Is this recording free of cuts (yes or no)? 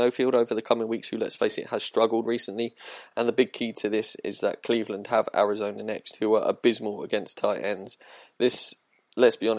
yes